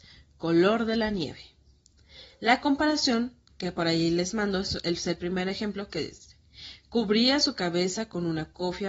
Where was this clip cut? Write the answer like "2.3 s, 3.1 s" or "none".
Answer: none